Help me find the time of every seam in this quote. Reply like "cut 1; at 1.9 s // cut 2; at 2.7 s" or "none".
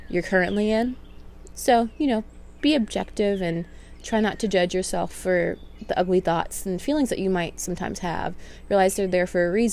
cut 1; at 1.5 s // cut 2; at 2.6 s